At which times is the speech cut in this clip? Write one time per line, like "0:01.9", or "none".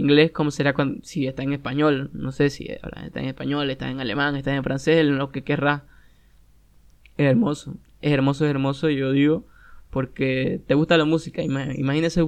none

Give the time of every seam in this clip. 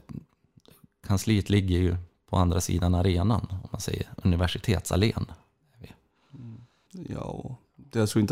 0:06.9

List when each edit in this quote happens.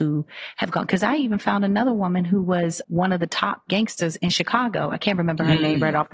0:02.8

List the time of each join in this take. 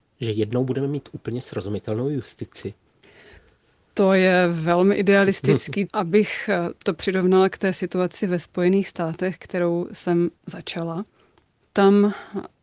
0:05.9

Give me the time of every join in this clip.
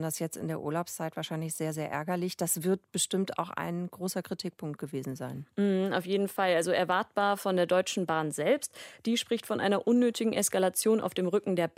none

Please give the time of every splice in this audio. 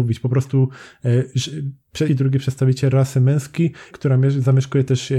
0:02.1
0:03.9

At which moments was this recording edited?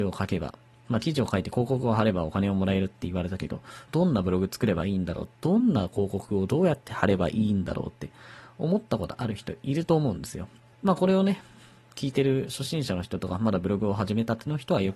0:03.9
0:10.7

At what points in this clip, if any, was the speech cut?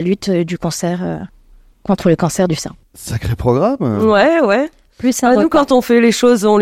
0:02.8

